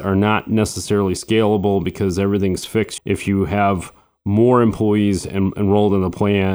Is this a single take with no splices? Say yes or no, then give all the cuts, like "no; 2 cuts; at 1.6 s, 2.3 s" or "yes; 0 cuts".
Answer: no; 1 cut; at 3.0 s